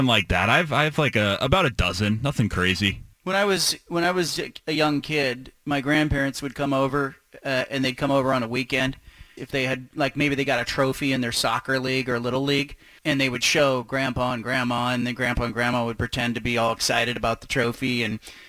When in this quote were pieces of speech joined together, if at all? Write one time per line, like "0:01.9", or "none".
0:03.1
0:09.4
0:13.0

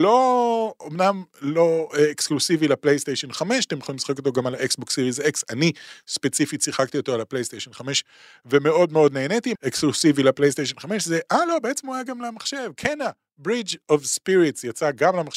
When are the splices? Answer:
0:09.6

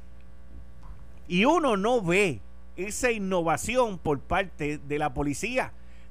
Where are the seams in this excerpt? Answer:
0:01.3

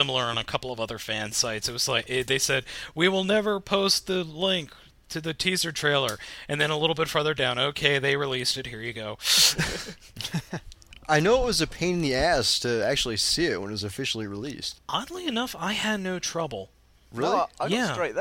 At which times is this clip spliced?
none

